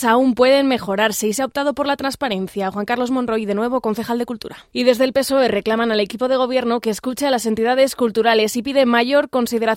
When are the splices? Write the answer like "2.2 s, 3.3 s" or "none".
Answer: 4.7 s